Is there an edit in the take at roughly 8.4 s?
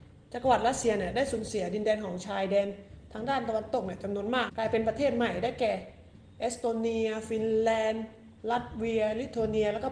yes; 2 cuts; at 4.5 s, 8.4 s

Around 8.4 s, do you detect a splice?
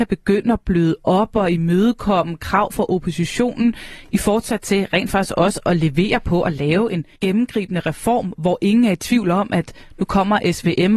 no; 1 cut; at 7.1 s

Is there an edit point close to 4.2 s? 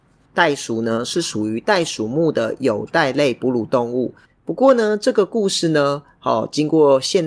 yes; 1 cut; at 4.2 s

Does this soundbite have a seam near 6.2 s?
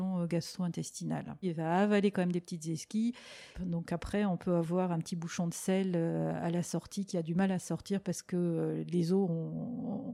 no; 2 cuts; at 1.4 s, 3.5 s

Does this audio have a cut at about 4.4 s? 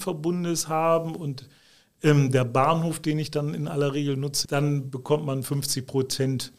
yes; 1 cut; at 4.4 s

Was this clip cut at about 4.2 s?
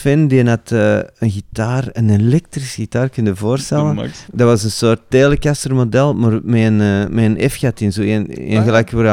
yes; 1 cut; at 4.2 s

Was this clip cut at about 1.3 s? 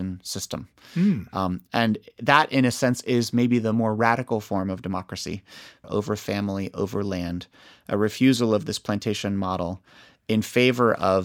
no; 1 cut; at 5.8 s

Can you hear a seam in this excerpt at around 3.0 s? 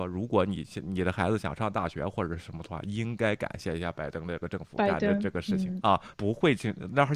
no; 1 cut; at 6.1 s

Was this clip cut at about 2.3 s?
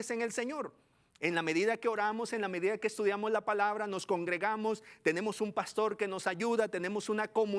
no; 0 cuts

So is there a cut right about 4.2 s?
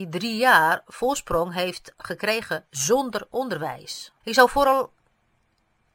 yes; 2 cuts; at 1.9 s, 4.2 s

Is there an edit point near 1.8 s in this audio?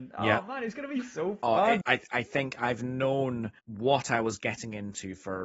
yes; 2 cuts; at 1.8 s, 3.6 s

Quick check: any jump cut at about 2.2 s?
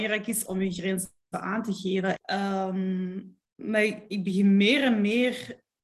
yes; 2 cuts; at 2.2 s, 3.4 s

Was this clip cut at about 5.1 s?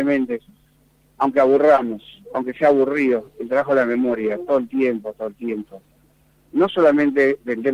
yes; 1 cut; at 5.1 s

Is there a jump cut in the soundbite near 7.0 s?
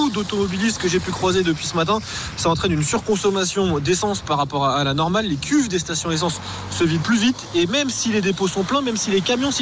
yes; 1 cut; at 7.0 s

